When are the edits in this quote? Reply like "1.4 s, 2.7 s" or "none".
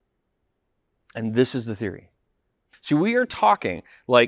2.7 s